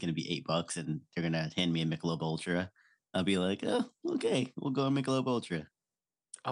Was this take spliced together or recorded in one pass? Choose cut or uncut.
uncut